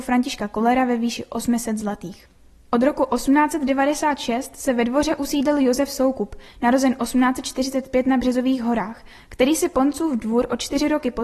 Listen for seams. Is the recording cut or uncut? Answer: uncut